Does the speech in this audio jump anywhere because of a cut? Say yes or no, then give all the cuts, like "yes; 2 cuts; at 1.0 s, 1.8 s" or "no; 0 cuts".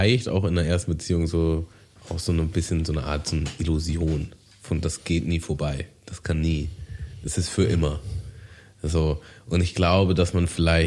no; 0 cuts